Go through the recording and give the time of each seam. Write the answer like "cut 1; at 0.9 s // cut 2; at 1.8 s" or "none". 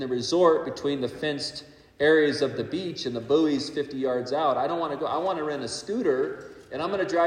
none